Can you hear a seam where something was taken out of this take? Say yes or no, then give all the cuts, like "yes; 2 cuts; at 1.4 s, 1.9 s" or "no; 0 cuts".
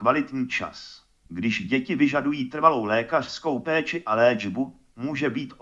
yes; 1 cut; at 1.3 s